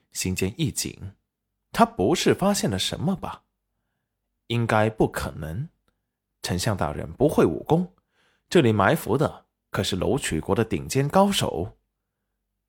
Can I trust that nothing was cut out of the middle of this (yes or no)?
yes